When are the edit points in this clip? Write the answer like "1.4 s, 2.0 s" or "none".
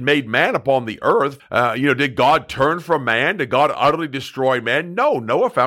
1.4 s